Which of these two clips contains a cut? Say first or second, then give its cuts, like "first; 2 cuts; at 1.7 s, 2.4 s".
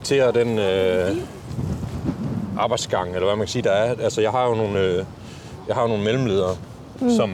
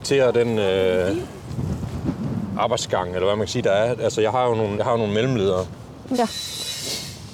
second; 2 cuts; at 4.7 s, 6.1 s